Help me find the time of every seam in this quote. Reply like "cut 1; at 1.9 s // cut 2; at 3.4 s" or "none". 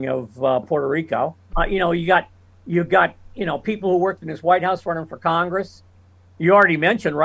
cut 1; at 1.5 s